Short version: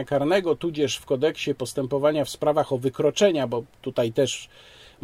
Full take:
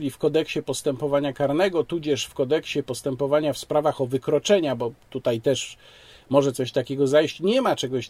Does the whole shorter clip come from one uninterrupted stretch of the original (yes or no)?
yes